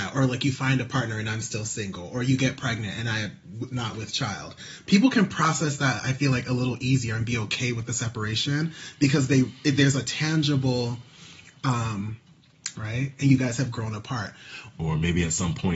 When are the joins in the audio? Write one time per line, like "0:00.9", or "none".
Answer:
0:12.7
0:14.7